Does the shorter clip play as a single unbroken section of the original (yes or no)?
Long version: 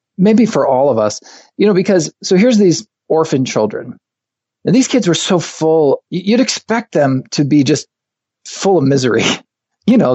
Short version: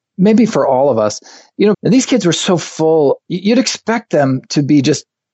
no